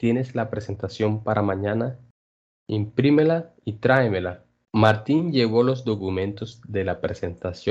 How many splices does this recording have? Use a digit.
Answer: 1